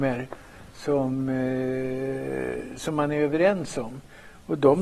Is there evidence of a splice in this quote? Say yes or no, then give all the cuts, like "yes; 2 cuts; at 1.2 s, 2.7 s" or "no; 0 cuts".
no; 0 cuts